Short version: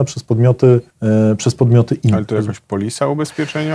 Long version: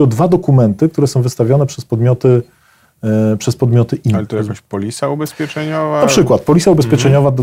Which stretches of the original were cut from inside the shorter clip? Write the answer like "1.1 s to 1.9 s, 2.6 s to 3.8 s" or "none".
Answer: 2.5 s to 2.9 s